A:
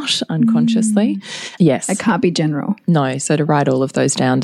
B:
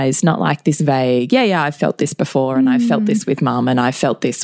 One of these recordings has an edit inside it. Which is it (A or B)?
A